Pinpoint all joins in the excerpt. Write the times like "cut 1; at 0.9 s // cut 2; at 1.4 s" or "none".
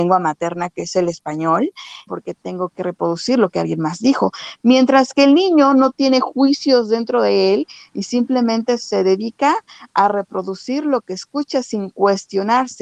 cut 1; at 2.1 s